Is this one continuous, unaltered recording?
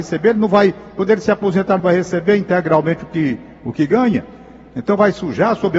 yes; 0 cuts

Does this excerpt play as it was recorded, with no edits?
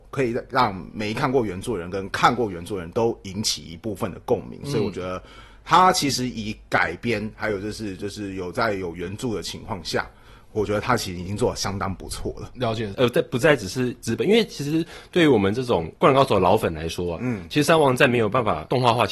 no; 1 cut; at 12.9 s

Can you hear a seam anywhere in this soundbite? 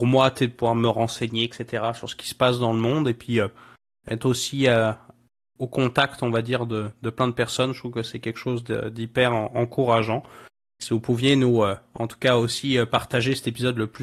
no; 0 cuts

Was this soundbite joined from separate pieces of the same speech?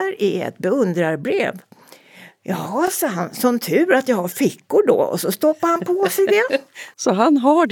no; 0 cuts

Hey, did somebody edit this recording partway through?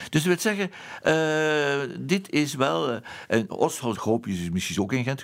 yes; 1 cut; at 3.9 s

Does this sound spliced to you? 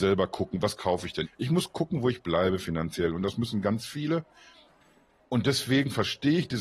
yes; 1 cut; at 1.2 s

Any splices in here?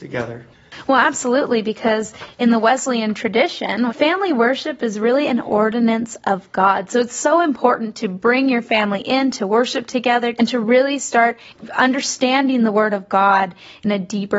yes; 2 cuts; at 3.9 s, 10.3 s

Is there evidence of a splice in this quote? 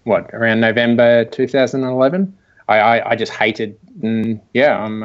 yes; 1 cut; at 4.0 s

